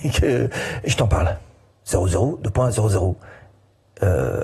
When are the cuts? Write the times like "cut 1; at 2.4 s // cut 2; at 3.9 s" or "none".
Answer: cut 1; at 1.8 s